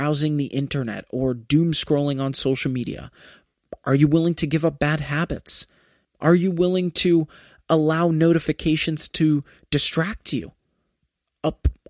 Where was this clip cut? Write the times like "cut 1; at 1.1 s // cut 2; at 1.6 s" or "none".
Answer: cut 1; at 6.0 s